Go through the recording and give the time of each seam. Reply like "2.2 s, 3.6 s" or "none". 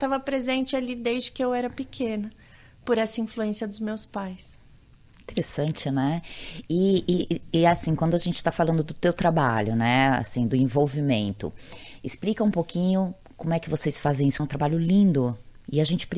14.4 s